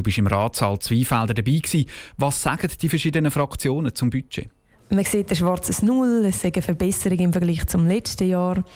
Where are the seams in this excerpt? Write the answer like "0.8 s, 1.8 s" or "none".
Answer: 4.8 s